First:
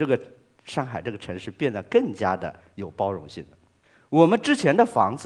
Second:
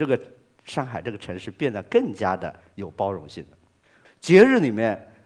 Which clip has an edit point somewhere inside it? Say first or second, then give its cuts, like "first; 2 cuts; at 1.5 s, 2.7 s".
second; 1 cut; at 4.0 s